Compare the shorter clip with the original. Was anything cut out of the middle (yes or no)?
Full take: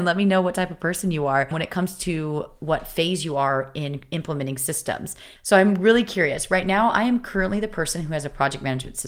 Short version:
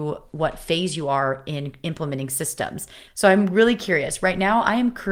no